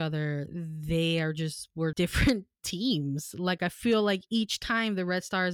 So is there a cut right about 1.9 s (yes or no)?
yes